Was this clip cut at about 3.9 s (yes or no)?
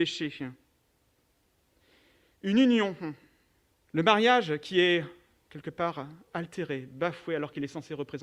yes